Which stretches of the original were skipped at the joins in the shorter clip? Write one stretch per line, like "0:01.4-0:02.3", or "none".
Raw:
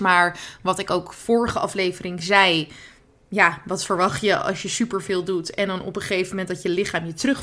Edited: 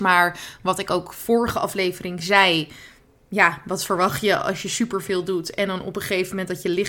none